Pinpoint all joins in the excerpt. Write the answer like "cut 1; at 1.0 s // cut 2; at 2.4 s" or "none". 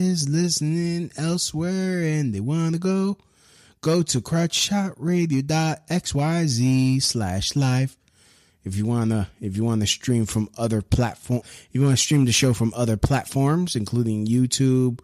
cut 1; at 11.4 s